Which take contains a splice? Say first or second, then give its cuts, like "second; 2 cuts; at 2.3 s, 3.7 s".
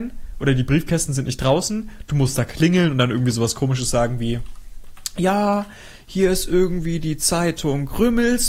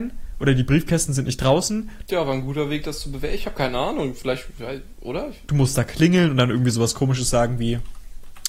second; 2 cuts; at 2.1 s, 5.5 s